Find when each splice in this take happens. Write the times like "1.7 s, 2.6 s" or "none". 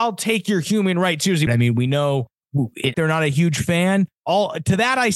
1.5 s, 2.9 s